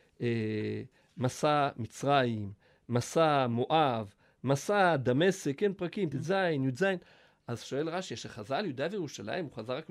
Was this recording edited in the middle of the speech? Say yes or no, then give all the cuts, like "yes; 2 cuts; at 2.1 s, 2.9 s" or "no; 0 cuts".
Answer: yes; 1 cut; at 6.1 s